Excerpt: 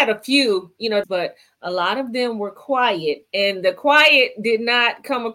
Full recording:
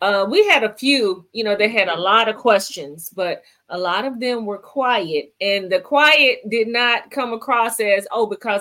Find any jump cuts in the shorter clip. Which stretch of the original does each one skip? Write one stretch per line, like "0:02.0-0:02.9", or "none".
0:01.6-0:03.1